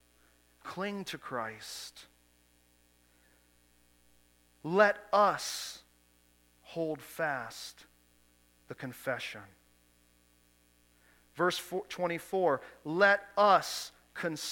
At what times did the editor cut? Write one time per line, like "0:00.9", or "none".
none